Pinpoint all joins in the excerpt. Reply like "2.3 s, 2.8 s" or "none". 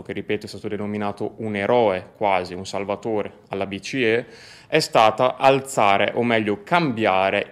none

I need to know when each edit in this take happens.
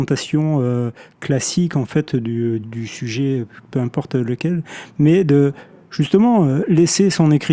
2.6 s

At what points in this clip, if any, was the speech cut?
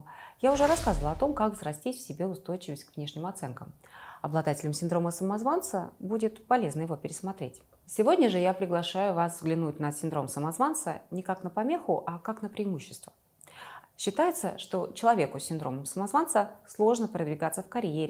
13.8 s

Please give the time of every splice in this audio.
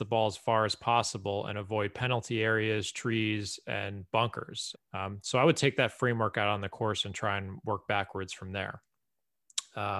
4.7 s

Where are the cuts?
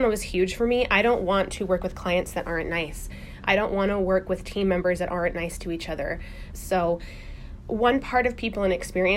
6.5 s, 7.6 s

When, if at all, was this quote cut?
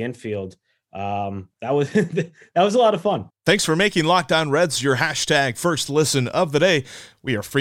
3.3 s

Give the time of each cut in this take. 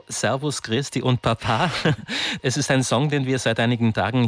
2.4 s

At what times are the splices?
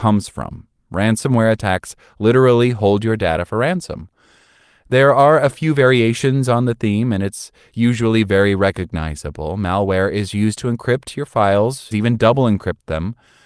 11.9 s

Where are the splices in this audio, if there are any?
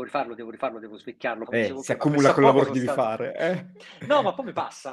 1.5 s

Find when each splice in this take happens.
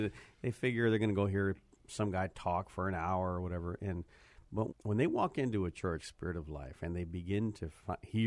4.7 s, 6.0 s

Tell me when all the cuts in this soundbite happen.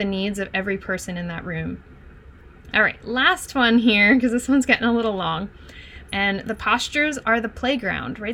2.7 s, 6.1 s

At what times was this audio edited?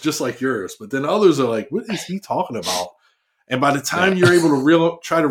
none

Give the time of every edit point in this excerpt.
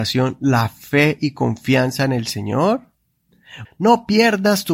3.6 s

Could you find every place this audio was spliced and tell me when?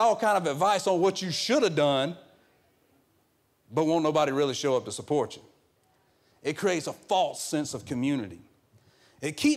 none

